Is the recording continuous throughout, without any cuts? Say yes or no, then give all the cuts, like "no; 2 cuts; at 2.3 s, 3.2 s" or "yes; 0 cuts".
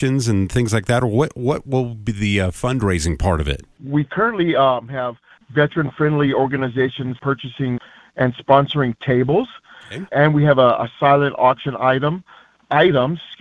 yes; 0 cuts